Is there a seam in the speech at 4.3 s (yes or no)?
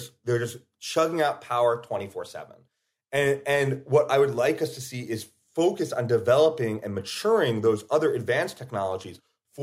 no